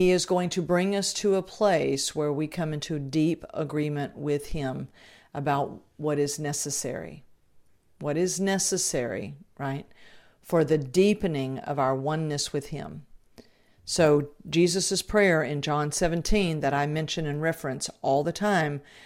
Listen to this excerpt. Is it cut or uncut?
uncut